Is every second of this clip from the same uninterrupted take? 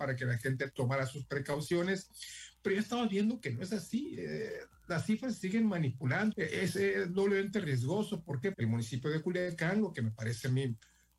no; 2 cuts; at 6.3 s, 8.5 s

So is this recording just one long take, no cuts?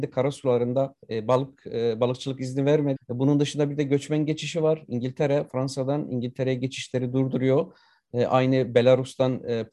no; 2 cuts; at 1.0 s, 3.0 s

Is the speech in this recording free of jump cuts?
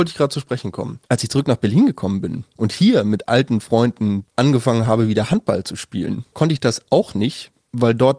yes; 0 cuts

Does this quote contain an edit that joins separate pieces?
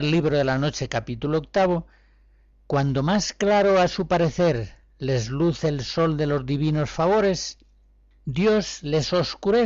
no; 0 cuts

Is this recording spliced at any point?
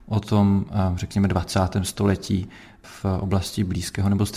no; 0 cuts

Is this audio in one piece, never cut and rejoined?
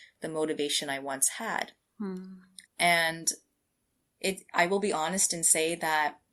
no; 1 cut; at 2.6 s

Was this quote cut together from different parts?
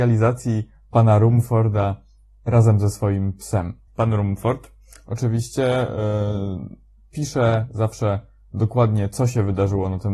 yes; 1 cut; at 3.9 s

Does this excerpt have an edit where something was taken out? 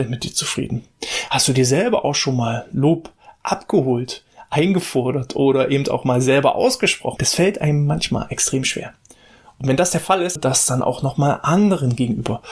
yes; 2 cuts; at 7.2 s, 10.4 s

